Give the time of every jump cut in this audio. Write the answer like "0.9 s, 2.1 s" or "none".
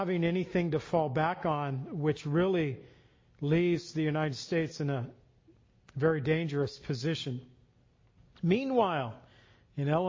none